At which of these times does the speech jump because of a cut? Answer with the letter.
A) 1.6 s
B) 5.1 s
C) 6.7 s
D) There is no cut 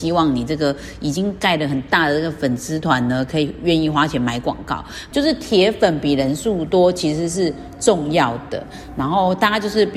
B